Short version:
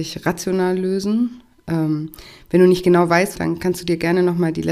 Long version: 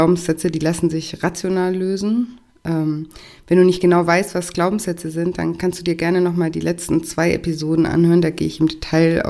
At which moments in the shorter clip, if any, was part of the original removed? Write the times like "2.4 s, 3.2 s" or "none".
3.4 s